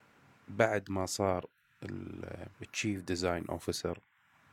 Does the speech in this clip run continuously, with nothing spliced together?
no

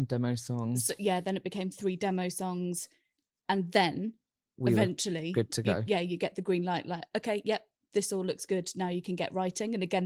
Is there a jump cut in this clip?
no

